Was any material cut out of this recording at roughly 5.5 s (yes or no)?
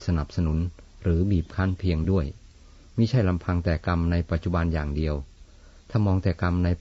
no